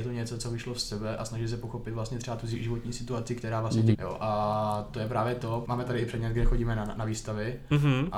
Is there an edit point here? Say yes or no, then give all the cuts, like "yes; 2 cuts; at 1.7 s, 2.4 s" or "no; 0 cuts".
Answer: yes; 2 cuts; at 3.9 s, 5.6 s